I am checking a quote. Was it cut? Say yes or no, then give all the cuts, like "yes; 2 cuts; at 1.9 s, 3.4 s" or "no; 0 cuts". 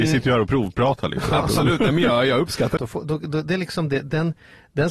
yes; 1 cut; at 2.8 s